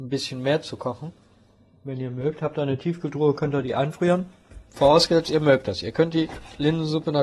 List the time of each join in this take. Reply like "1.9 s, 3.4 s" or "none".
4.7 s